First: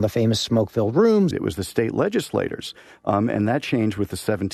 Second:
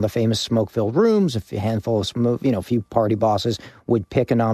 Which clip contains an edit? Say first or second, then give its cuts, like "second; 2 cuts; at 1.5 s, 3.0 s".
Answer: first; 1 cut; at 1.3 s